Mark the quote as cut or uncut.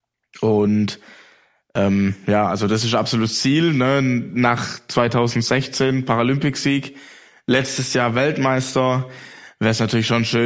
uncut